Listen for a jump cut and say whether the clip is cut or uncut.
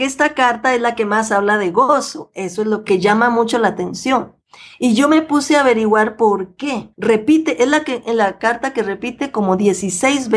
cut